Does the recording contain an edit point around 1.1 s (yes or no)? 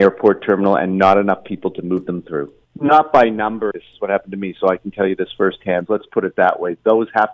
no